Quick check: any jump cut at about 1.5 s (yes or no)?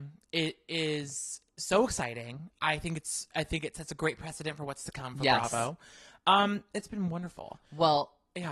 no